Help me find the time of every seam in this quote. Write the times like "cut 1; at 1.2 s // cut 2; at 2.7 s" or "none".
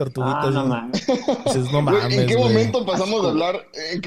none